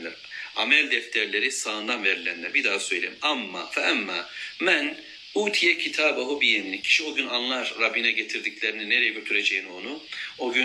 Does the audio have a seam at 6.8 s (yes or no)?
yes